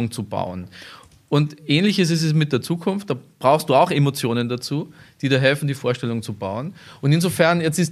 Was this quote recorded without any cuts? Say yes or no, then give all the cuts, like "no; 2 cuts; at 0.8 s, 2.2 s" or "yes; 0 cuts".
yes; 0 cuts